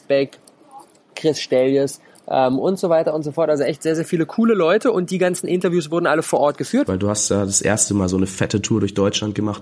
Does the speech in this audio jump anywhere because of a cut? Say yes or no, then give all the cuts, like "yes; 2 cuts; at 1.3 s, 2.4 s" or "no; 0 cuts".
yes; 1 cut; at 6.9 s